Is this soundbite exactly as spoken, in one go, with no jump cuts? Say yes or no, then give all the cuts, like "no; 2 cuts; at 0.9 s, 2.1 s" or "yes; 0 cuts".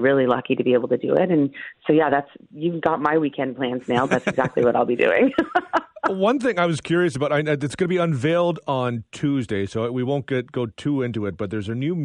yes; 0 cuts